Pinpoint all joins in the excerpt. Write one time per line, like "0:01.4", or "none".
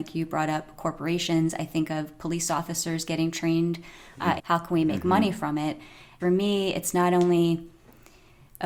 0:04.4
0:06.2